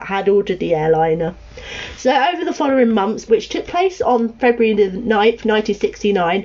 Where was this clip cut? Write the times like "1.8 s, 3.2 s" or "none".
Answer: 3.3 s, 4.4 s